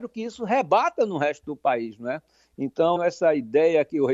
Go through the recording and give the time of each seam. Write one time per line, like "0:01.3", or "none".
0:03.0